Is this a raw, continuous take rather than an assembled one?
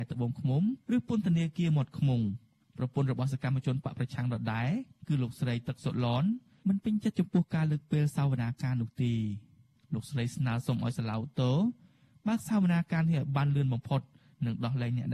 yes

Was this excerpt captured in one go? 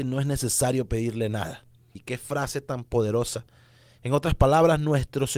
no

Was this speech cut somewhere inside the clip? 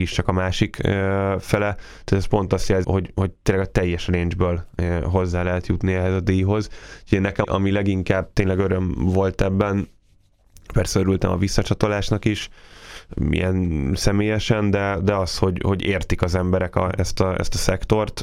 yes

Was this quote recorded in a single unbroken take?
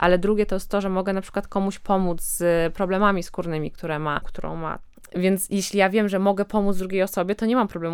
no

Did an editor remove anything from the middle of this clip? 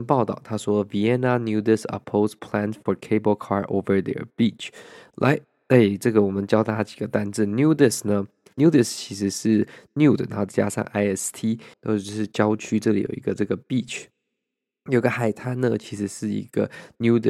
yes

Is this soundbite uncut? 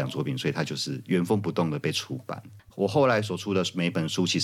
no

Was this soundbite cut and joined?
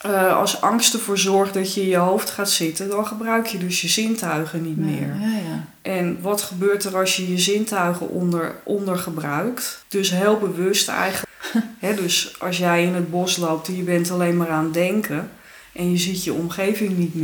yes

